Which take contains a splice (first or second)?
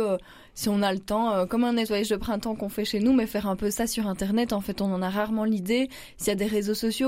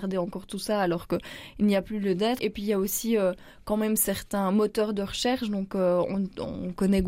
second